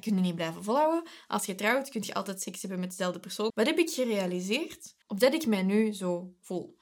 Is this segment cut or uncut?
cut